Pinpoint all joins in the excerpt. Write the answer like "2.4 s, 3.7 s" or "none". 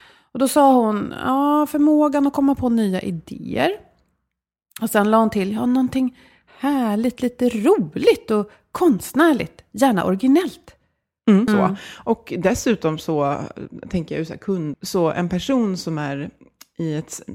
11.5 s, 14.7 s